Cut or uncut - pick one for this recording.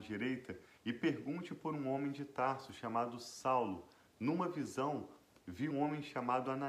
cut